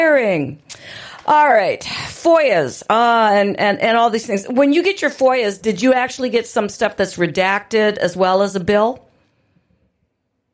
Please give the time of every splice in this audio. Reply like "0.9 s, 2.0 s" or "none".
5.6 s